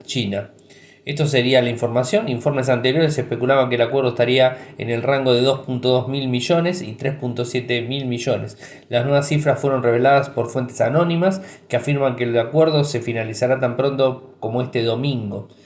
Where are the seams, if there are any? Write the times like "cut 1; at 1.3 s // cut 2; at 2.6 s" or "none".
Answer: none